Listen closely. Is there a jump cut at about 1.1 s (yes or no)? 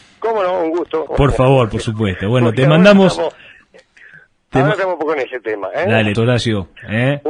yes